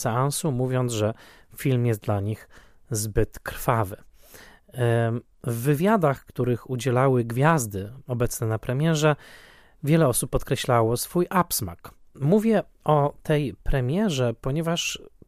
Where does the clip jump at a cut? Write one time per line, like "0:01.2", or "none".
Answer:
0:12.1